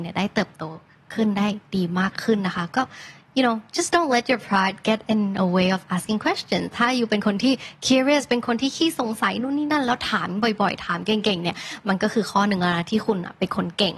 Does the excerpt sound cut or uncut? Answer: uncut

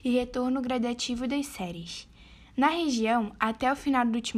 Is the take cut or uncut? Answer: uncut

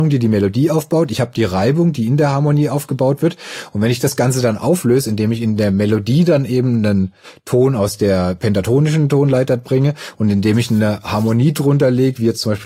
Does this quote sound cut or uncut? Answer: uncut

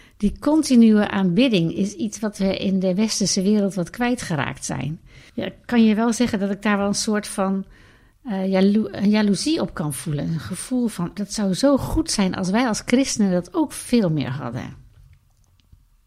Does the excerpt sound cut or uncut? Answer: cut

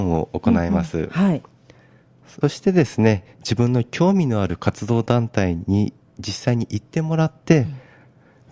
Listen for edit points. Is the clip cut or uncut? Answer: cut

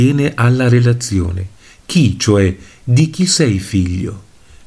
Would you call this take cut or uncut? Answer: uncut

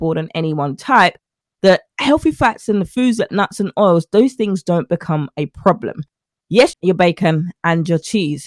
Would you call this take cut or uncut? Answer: cut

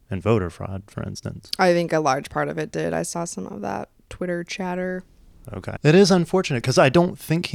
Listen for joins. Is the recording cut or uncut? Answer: cut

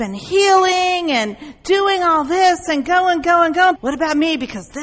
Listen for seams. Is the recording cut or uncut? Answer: cut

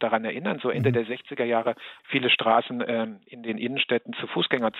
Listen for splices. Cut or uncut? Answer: cut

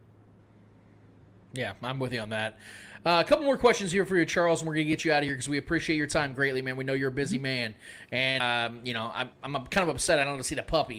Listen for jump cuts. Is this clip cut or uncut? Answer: uncut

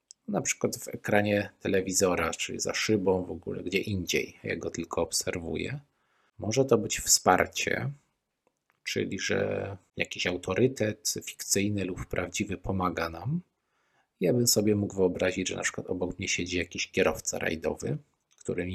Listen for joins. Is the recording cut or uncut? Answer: uncut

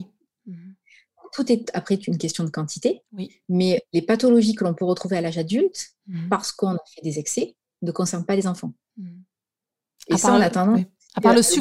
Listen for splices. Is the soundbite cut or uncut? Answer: uncut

